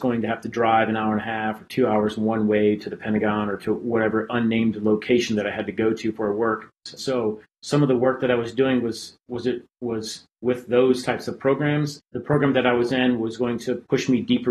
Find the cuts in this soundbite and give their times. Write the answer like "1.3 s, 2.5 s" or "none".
7.0 s, 12.0 s